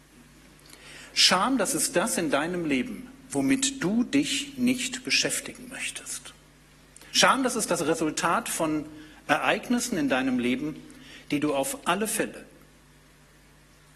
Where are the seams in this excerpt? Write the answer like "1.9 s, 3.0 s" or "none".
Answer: none